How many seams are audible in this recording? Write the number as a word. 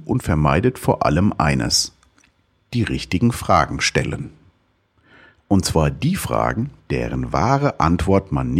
zero